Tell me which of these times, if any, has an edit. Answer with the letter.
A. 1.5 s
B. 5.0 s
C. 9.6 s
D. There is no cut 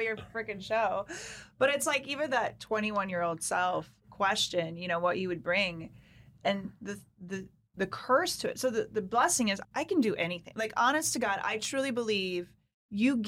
C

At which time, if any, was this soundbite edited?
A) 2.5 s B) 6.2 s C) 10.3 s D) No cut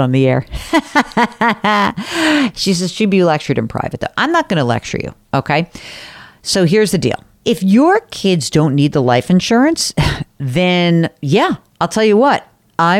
D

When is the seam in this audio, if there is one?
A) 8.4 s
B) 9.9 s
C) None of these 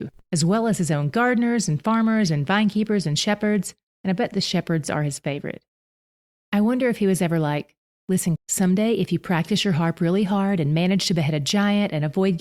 A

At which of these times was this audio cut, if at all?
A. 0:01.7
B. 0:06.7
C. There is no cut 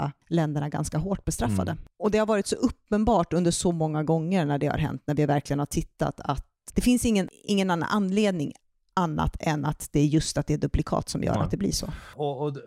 B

